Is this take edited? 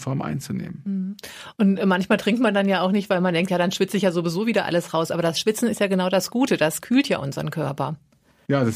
no; 0 cuts

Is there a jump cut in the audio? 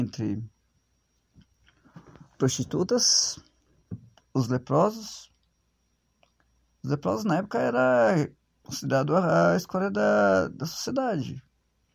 no; 0 cuts

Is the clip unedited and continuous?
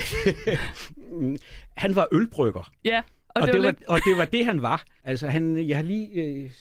no; 1 cut; at 5.0 s

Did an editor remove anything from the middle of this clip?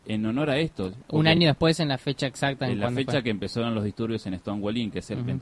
no; 0 cuts

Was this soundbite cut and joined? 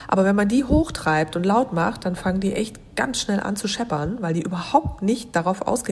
no; 0 cuts

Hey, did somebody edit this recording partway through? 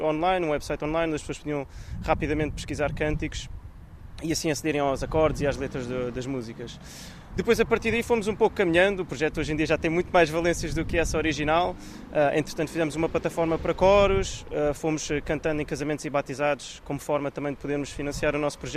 no; 0 cuts

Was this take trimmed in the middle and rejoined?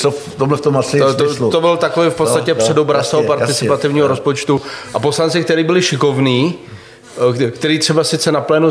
no; 0 cuts

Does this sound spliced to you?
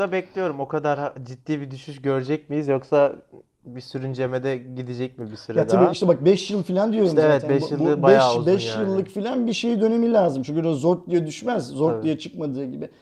no; 0 cuts

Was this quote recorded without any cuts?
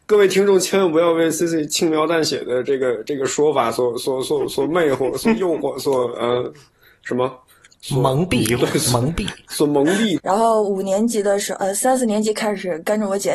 no; 1 cut; at 10.2 s

